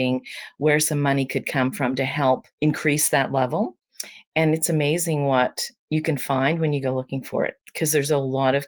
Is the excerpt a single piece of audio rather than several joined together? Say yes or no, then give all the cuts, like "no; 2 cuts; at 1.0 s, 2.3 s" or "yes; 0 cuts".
no; 1 cut; at 2.5 s